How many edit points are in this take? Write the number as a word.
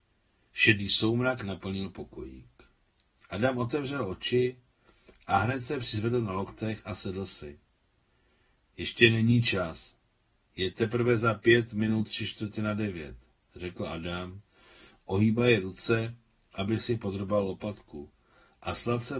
one